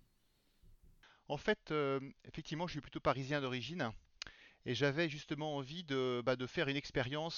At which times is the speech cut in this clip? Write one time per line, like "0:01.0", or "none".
none